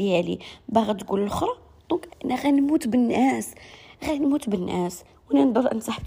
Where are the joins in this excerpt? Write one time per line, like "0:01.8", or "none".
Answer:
0:02.1